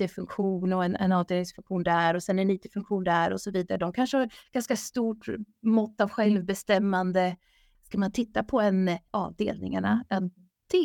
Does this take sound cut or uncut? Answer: cut